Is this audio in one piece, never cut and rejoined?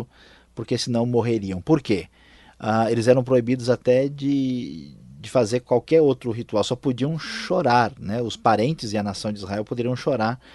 yes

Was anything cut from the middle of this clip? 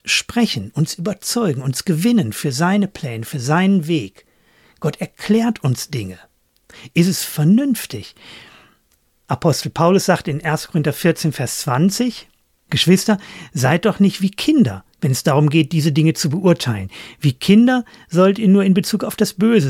no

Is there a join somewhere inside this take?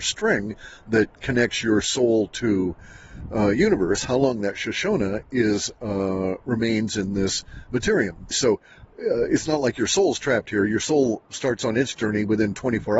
yes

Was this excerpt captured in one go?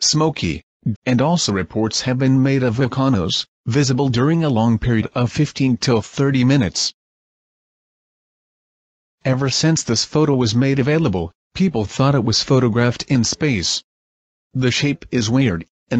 no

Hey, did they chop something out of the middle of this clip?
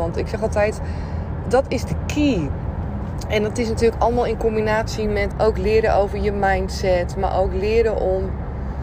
yes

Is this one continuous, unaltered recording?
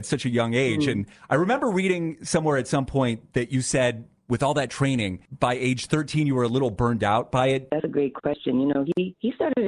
no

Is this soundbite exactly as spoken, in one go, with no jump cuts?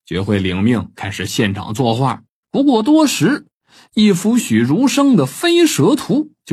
no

